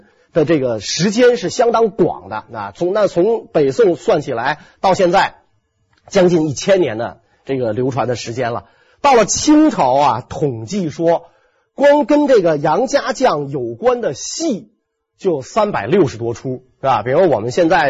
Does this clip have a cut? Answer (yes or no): no